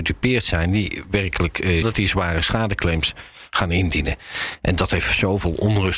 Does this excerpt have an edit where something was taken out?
yes; 1 cut; at 1.8 s

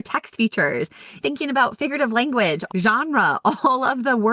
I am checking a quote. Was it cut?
yes; 2 cuts; at 1.2 s, 2.7 s

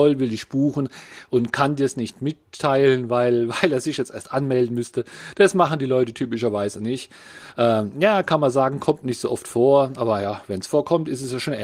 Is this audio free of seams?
yes; 0 cuts

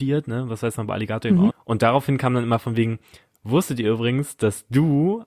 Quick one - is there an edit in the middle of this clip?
yes; 1 cut; at 1.5 s

